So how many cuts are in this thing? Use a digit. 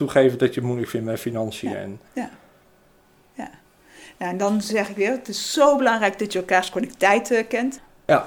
1